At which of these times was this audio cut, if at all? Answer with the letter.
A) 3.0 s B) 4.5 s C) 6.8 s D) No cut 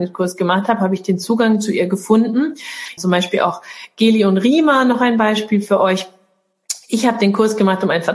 A